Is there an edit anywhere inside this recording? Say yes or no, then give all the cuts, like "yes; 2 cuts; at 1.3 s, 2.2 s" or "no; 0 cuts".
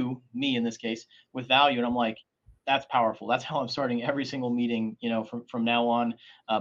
no; 0 cuts